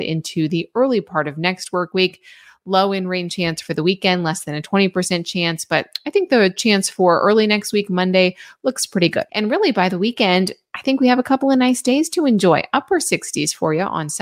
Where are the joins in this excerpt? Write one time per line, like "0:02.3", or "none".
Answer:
0:09.3